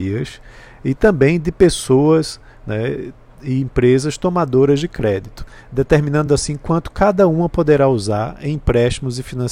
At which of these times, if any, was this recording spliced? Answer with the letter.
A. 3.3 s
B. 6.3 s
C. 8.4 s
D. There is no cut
D